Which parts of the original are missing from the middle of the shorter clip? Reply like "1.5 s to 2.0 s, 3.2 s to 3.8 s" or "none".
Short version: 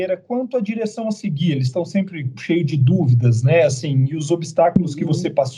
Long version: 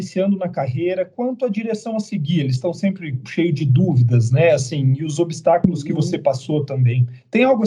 none